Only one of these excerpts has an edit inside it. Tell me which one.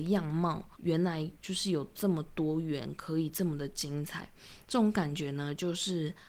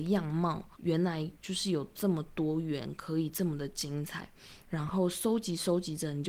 second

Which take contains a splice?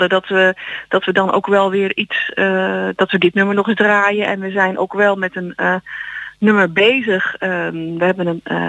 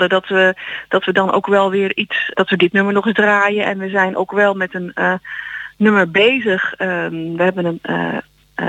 second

